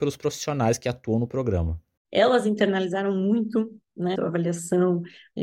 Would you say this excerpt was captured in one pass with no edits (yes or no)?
no